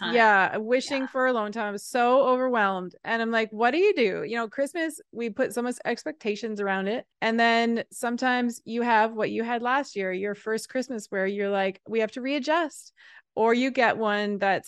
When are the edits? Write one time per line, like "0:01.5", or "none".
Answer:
0:07.1
0:13.2